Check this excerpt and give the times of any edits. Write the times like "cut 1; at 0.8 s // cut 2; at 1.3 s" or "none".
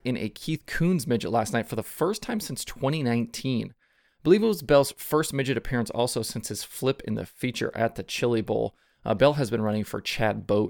none